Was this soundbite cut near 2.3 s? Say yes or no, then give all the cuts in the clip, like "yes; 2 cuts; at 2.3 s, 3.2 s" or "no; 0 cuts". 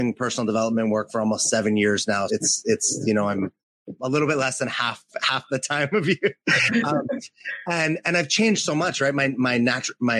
yes; 1 cut; at 2.3 s